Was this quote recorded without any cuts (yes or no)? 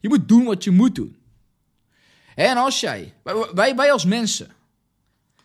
yes